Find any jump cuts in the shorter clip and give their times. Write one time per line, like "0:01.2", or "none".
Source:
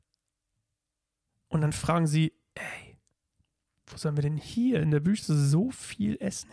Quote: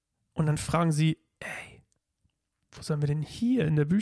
none